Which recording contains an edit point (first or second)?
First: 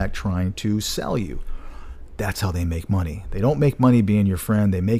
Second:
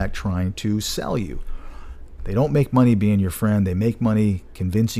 second